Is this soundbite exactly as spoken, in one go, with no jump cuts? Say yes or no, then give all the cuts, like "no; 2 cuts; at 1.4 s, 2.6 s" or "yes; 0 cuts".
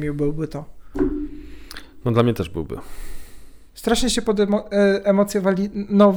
no; 1 cut; at 3.7 s